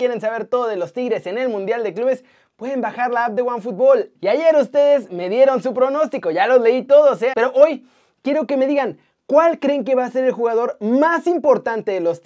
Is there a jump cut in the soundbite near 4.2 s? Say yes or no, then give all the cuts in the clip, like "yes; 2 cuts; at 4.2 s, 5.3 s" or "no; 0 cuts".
yes; 2 cuts; at 4.2 s, 7.3 s